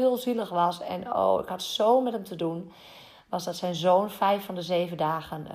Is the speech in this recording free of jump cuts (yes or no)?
yes